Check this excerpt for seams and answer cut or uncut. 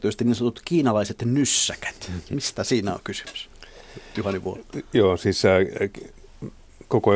uncut